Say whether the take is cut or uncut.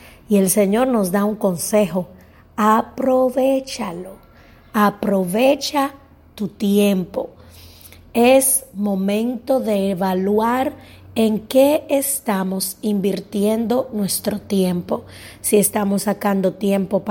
uncut